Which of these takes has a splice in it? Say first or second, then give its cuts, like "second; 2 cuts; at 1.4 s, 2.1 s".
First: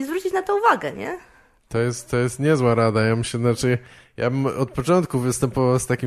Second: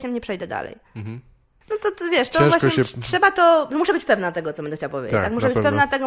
second; 1 cut; at 1.6 s